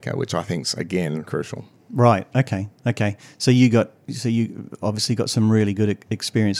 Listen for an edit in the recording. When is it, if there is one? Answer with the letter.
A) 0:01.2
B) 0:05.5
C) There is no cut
A